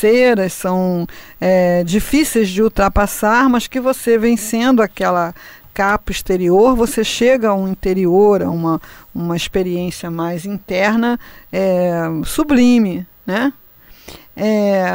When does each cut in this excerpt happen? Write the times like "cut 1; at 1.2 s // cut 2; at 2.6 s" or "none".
none